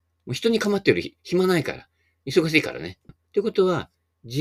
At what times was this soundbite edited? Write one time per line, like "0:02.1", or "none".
0:03.1